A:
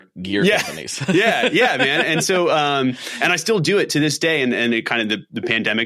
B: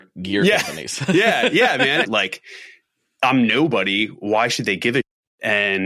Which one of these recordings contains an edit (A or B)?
B